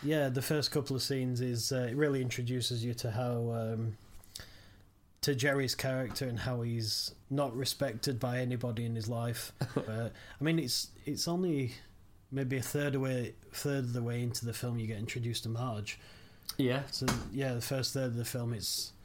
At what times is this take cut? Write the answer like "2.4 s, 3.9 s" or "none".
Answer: 7.2 s, 9.9 s